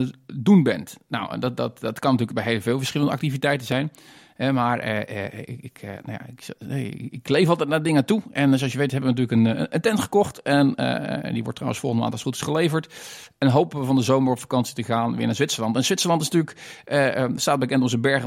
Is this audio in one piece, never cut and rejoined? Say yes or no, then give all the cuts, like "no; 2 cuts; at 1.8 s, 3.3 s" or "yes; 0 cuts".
yes; 0 cuts